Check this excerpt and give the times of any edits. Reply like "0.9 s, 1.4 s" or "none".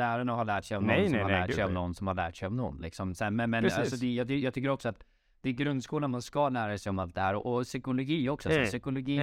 none